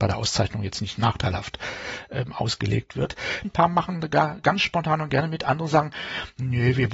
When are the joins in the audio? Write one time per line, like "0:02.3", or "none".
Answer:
0:03.4